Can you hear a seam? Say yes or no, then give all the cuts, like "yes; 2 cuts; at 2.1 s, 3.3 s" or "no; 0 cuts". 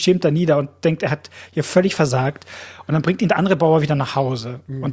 no; 0 cuts